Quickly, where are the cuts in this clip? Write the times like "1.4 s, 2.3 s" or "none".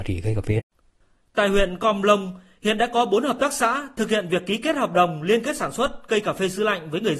none